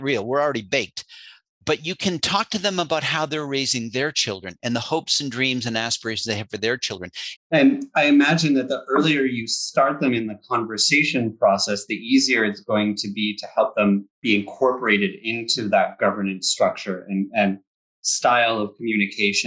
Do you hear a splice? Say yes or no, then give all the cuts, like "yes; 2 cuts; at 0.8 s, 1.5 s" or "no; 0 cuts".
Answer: yes; 2 cuts; at 7.4 s, 14.1 s